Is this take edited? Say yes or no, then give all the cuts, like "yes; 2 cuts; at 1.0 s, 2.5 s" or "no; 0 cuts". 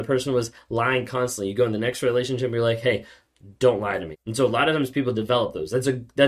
yes; 1 cut; at 4.1 s